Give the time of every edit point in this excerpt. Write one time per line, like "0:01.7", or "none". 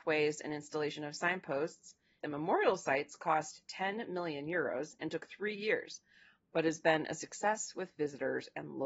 0:02.2